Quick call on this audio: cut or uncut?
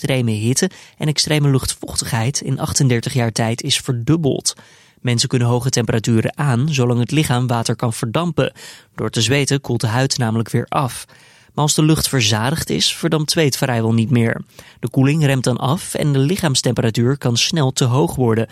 uncut